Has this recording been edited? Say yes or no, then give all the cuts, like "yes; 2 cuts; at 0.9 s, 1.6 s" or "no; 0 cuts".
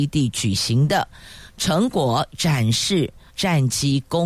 yes; 1 cut; at 3.3 s